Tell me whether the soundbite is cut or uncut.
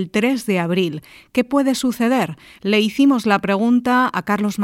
uncut